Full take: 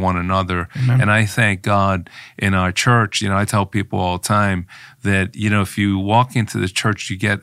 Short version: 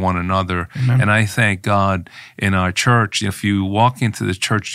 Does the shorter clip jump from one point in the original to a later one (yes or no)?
yes